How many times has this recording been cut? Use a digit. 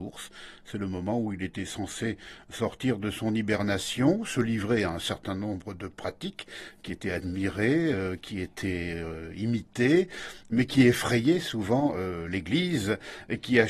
0